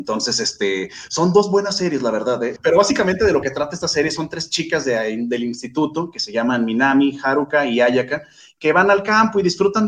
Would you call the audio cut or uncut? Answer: cut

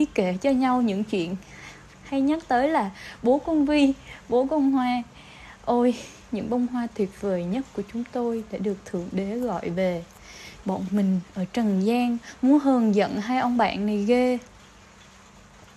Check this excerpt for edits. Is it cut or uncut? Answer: cut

